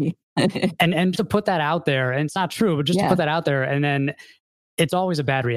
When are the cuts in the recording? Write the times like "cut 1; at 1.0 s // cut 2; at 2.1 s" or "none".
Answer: cut 1; at 1.1 s